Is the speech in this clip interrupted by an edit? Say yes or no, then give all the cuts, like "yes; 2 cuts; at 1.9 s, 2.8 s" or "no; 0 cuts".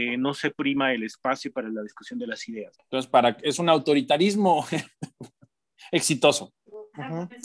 yes; 1 cut; at 2.7 s